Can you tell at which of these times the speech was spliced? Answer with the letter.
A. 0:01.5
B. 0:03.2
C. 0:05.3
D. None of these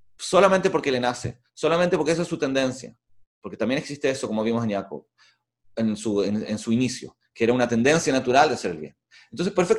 D